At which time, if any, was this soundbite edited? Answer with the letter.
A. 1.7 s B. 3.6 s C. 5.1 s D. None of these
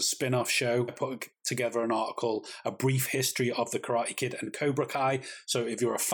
D